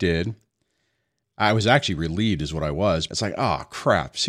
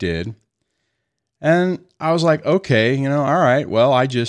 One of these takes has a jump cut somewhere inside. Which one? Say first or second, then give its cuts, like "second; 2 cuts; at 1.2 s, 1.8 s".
first; 2 cuts; at 1.2 s, 3.1 s